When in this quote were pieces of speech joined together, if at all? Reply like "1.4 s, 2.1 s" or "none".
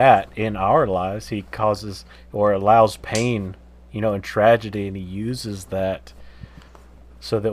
none